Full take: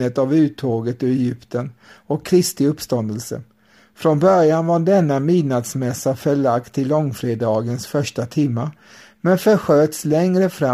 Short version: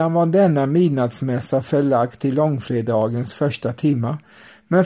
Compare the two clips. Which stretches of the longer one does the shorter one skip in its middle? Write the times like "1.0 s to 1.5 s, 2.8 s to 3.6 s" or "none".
none